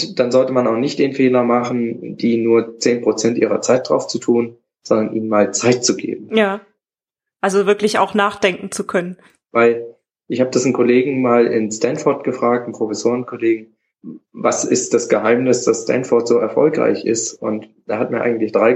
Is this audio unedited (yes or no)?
yes